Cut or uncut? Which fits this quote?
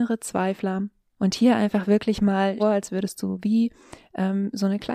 cut